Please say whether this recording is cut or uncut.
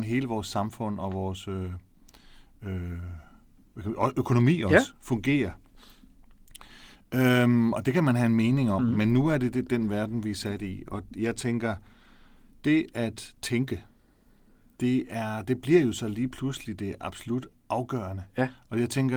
uncut